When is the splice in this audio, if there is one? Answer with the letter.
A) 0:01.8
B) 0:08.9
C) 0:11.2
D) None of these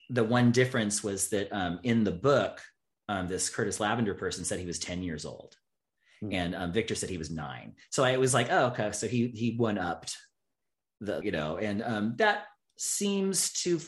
C